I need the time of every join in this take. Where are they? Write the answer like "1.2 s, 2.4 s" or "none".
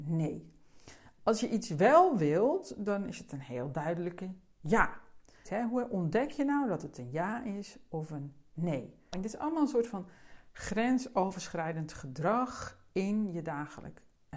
5.5 s, 9.1 s